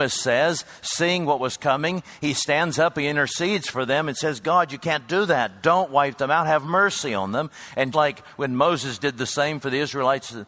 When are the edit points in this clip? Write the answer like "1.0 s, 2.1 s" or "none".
7.9 s